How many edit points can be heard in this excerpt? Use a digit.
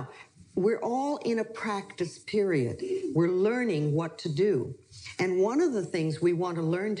0